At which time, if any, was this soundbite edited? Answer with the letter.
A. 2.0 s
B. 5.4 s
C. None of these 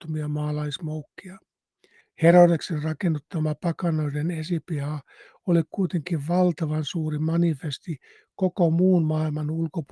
A